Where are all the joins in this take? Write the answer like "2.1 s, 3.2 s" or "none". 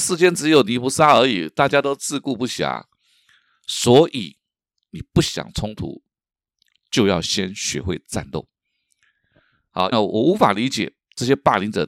3.5 s, 9.9 s